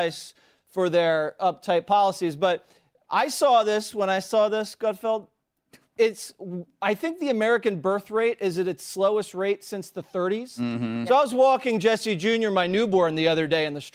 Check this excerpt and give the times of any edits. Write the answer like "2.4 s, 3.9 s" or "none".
none